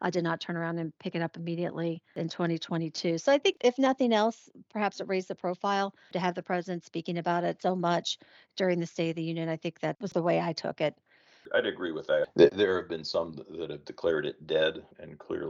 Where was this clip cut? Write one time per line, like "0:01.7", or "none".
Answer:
none